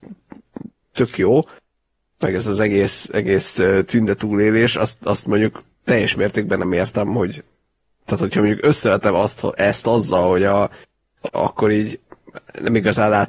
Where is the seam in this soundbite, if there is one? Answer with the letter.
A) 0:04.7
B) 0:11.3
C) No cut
B